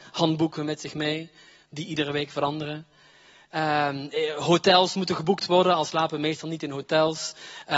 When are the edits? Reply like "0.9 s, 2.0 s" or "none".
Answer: none